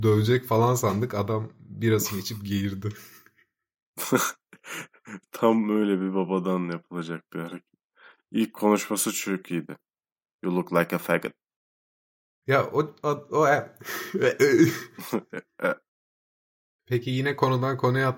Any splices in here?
no; 0 cuts

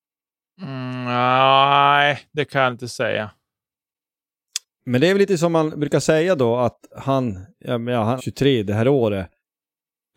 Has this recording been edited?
yes; 1 cut; at 8.2 s

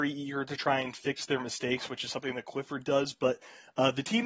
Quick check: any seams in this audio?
no; 0 cuts

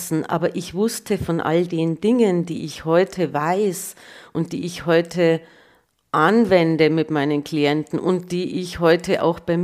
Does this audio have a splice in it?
no; 0 cuts

